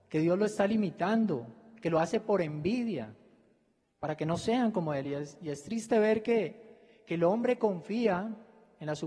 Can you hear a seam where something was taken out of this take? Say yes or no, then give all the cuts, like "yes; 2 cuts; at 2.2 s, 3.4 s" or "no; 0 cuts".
no; 0 cuts